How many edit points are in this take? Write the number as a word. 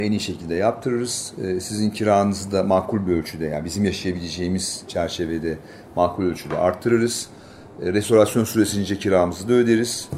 zero